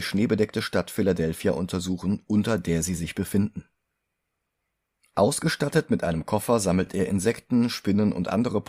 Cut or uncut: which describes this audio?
uncut